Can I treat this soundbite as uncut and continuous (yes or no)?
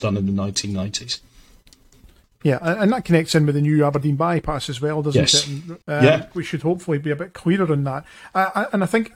no